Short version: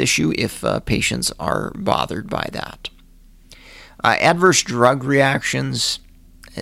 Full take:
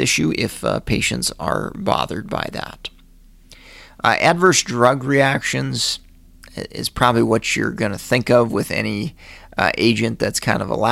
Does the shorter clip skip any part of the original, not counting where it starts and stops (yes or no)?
no